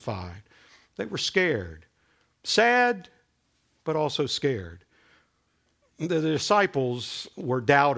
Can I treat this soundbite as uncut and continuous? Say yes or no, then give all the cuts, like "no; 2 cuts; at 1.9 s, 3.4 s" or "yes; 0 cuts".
yes; 0 cuts